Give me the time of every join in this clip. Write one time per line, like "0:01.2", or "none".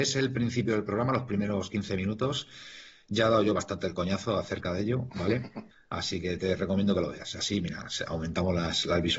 0:05.7

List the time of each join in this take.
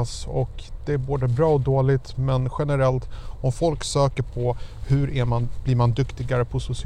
none

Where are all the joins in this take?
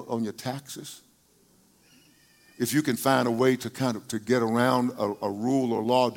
none

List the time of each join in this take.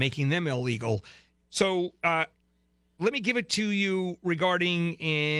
0:01.4

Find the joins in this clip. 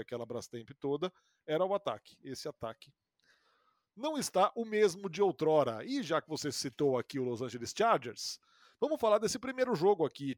none

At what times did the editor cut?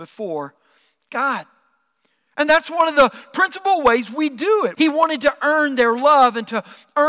0:04.7

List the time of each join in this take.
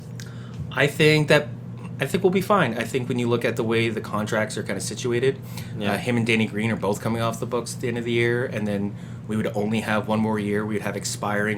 none

